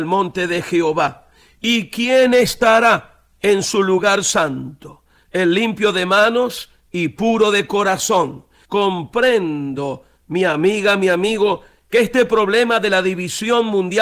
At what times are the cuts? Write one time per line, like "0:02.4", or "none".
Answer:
0:08.6